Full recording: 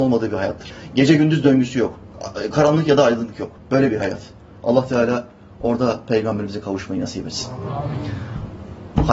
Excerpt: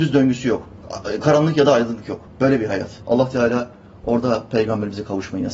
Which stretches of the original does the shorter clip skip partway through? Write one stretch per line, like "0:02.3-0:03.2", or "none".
0:04.3-0:04.6